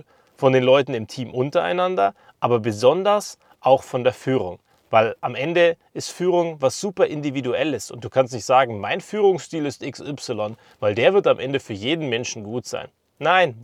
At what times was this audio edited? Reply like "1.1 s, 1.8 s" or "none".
4.7 s